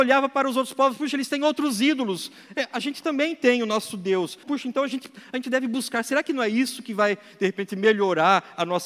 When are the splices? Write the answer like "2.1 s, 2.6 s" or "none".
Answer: 4.4 s